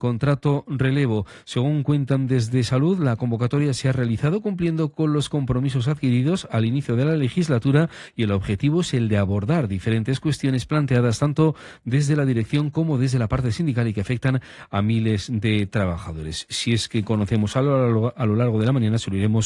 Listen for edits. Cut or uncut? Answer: uncut